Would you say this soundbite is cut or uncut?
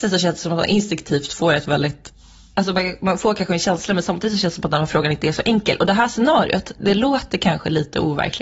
uncut